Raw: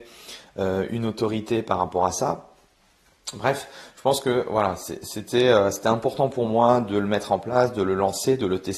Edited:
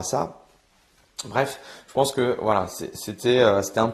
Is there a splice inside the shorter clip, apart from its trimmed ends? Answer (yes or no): no